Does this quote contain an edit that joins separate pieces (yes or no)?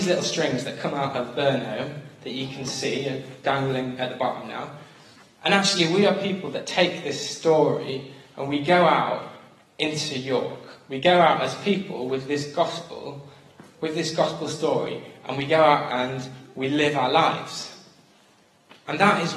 no